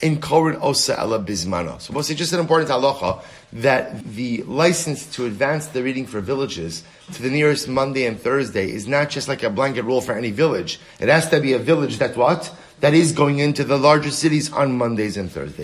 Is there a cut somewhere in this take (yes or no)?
yes